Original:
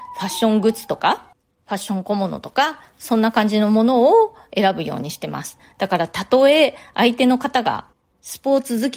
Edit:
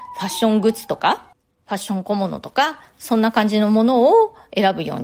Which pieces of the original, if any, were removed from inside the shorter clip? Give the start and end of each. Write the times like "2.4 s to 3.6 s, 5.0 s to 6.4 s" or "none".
none